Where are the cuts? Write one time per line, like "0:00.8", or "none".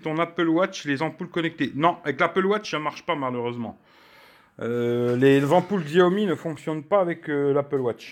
none